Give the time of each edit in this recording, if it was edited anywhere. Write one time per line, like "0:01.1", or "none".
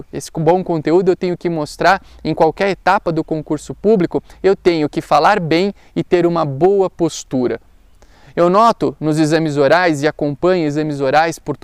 none